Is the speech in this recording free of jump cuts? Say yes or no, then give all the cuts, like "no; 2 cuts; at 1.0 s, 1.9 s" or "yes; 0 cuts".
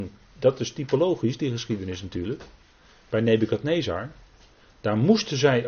yes; 0 cuts